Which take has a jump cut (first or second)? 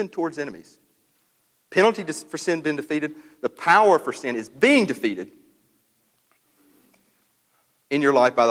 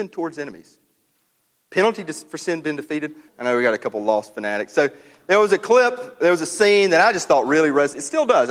second